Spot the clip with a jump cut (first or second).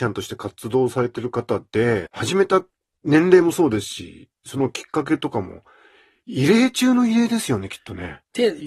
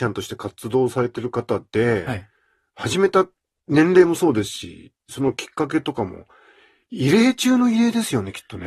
first